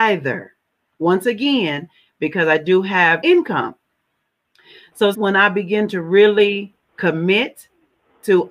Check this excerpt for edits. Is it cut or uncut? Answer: cut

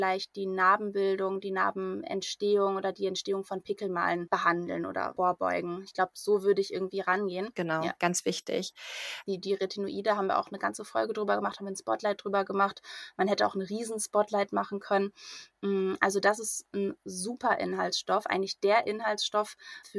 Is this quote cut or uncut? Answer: cut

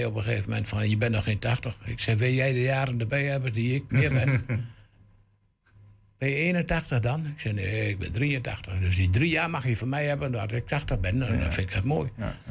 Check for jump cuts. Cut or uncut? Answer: cut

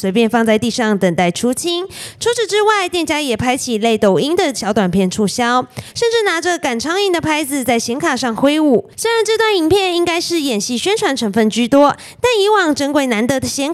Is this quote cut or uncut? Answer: cut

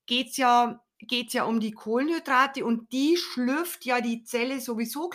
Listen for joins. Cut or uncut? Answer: cut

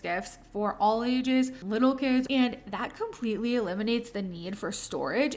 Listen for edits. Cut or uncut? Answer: cut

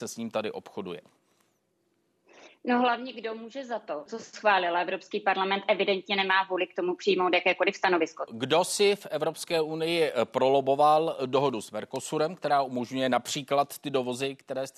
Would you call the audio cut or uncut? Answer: cut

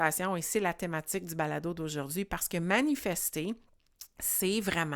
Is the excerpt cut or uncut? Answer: uncut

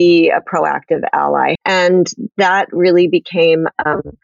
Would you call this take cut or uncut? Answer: cut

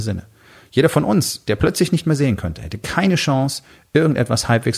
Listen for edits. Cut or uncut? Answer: uncut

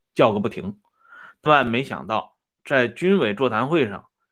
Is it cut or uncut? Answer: cut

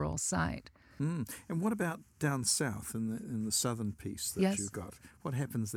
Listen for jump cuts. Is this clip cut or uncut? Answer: uncut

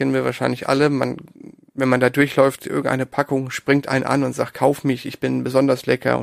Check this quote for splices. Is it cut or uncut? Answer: uncut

